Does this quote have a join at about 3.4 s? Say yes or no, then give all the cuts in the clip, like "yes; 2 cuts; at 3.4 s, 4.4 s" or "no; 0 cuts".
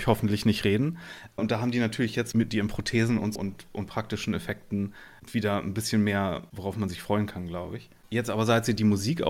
yes; 1 cut; at 3.4 s